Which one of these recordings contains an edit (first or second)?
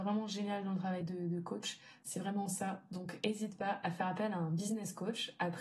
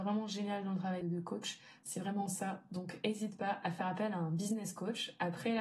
second